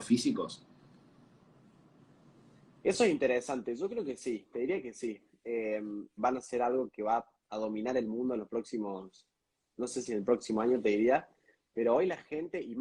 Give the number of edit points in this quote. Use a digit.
1